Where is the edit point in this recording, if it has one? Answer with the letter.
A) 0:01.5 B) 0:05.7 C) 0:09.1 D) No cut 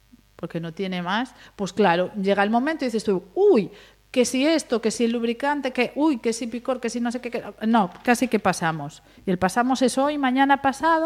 B